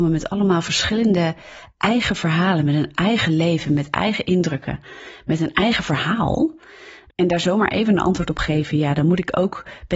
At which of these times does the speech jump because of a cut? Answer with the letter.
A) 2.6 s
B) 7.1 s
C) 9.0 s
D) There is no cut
B